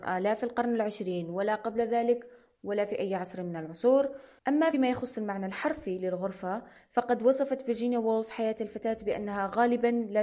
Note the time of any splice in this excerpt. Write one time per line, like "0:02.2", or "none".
none